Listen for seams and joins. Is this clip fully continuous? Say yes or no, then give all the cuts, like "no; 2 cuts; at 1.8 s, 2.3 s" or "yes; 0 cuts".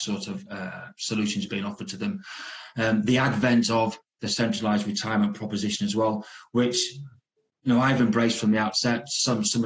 yes; 0 cuts